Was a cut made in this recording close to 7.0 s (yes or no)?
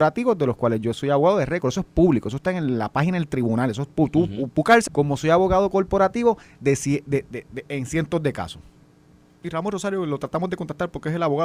no